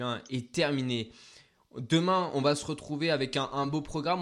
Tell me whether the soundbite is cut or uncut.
uncut